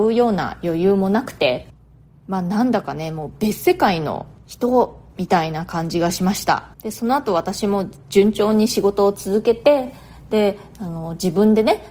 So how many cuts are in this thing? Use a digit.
1